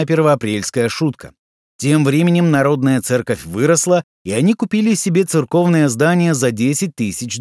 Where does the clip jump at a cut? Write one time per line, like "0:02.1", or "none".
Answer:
0:01.6